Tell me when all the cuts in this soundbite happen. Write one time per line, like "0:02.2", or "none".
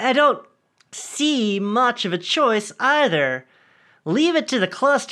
none